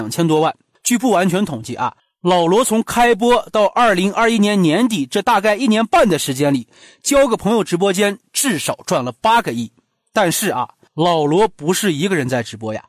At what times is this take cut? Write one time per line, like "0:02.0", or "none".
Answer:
none